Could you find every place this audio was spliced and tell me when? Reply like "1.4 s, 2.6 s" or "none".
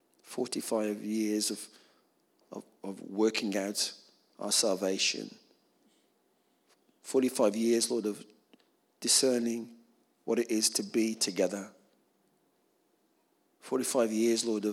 none